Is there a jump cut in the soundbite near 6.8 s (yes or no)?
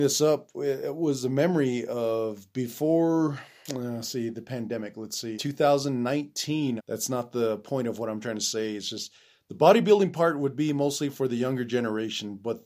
yes